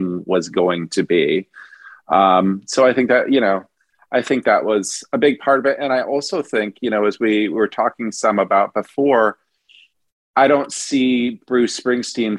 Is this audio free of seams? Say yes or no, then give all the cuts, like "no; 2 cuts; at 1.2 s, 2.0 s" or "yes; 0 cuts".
yes; 0 cuts